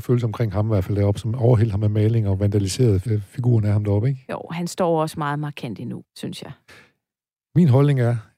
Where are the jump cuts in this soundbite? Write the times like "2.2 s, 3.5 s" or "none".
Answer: 3.1 s, 6.0 s

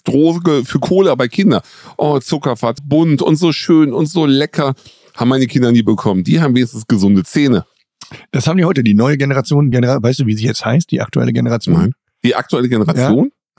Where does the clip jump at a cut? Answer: 2.8 s, 9.7 s

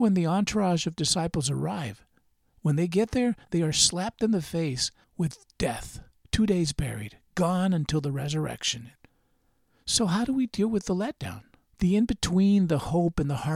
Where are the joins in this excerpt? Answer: none

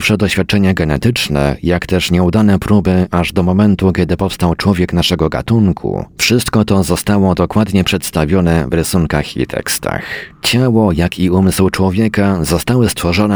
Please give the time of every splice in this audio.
none

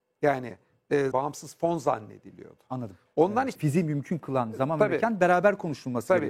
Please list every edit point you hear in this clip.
1.1 s, 3.6 s

